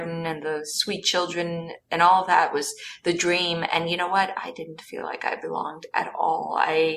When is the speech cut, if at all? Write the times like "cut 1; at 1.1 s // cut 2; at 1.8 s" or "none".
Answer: none